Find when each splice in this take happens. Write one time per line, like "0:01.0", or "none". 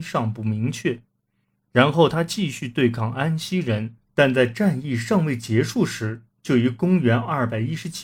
0:04.0